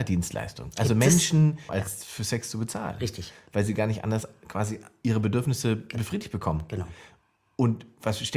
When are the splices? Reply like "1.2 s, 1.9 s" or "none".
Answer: 1.7 s